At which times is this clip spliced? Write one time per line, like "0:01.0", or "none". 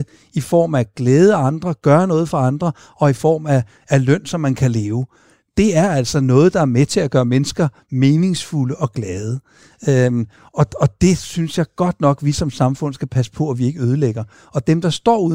none